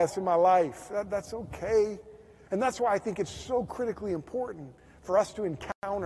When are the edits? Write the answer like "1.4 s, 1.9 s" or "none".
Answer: 2.4 s